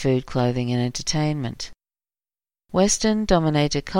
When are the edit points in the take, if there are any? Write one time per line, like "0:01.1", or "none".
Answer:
0:02.6